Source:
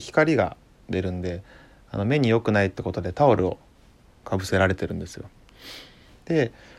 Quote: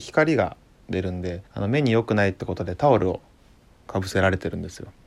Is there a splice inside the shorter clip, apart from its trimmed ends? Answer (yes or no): yes